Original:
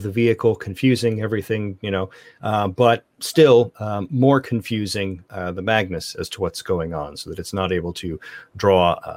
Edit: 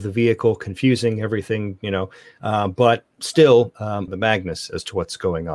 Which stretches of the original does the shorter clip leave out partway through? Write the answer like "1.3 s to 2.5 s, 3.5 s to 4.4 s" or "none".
4.1 s to 5.5 s